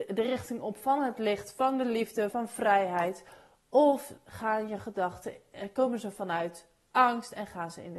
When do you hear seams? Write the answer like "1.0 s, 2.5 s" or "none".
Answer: 2.3 s